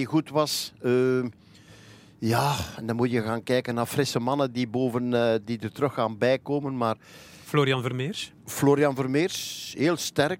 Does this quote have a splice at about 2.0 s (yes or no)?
no